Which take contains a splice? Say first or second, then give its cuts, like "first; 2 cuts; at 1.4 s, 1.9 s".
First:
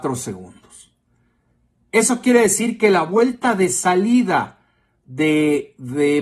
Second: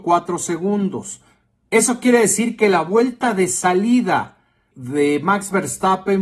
second; 2 cuts; at 1.7 s, 4.7 s